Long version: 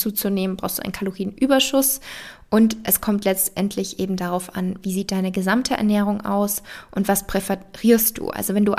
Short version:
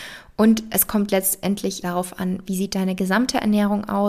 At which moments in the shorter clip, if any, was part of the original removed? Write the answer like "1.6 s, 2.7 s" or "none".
1.8 s